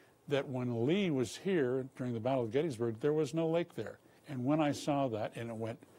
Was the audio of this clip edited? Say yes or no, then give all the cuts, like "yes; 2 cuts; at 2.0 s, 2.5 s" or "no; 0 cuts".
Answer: yes; 1 cut; at 4.2 s